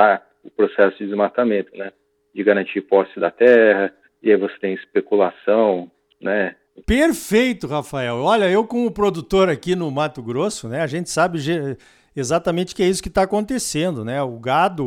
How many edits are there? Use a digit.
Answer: 1